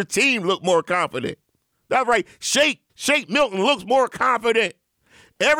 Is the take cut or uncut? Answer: cut